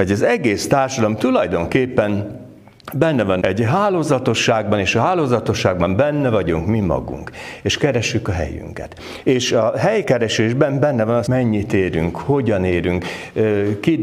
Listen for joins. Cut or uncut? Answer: cut